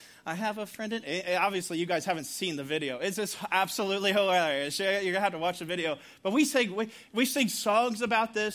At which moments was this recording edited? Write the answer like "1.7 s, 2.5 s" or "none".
none